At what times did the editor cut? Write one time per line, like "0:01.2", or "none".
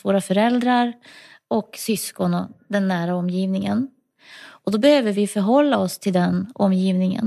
none